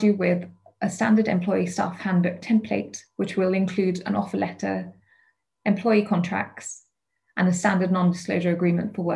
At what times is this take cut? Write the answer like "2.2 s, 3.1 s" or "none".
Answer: none